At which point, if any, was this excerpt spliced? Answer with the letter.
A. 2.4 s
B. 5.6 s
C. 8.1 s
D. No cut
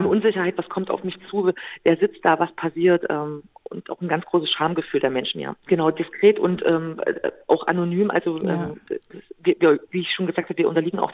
B